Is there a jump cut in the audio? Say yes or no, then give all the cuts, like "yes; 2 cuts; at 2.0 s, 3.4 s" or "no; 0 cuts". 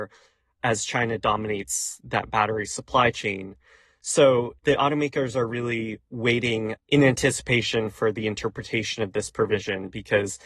no; 0 cuts